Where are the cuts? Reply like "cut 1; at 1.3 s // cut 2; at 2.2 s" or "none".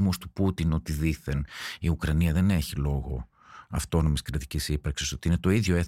none